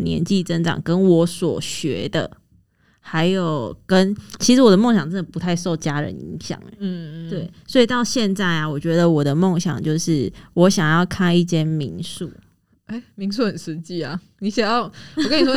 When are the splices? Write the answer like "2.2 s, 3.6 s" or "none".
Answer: none